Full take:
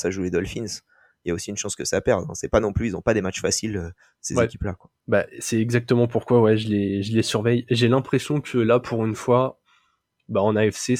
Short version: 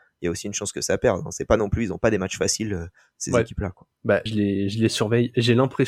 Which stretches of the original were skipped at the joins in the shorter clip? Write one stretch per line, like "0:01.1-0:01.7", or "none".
0:05.3-0:06.6